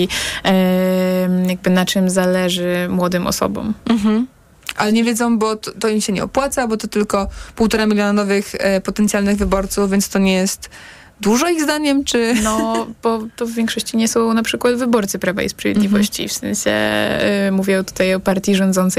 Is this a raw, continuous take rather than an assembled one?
yes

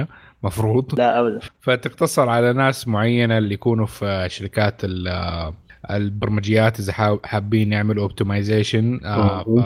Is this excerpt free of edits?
no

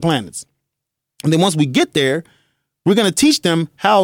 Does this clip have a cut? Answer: no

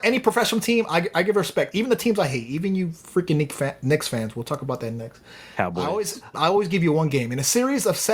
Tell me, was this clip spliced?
yes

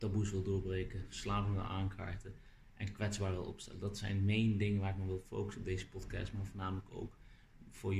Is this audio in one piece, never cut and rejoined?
yes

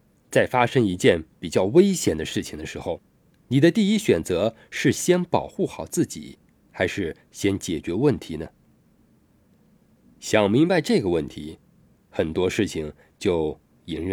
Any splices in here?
no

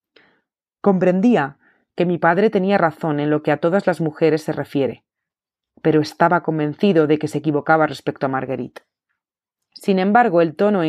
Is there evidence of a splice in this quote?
no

